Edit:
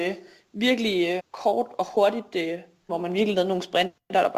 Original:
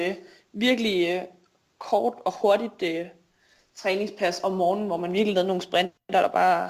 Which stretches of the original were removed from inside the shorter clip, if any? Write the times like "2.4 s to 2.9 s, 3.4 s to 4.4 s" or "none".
1.2 s to 1.7 s, 3.4 s to 4.9 s